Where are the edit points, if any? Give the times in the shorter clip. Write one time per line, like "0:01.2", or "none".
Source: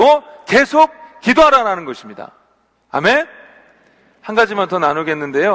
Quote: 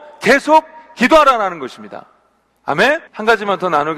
0:03.1